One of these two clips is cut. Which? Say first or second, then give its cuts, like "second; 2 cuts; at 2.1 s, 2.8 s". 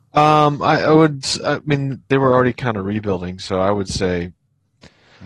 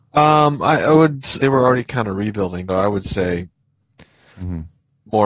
second; 2 cuts; at 1.4 s, 2.7 s